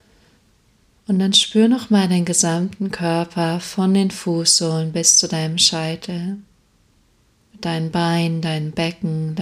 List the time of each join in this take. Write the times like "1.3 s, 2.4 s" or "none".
none